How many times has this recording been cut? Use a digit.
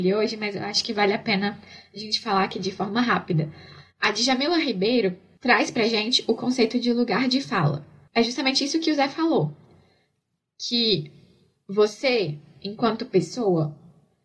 0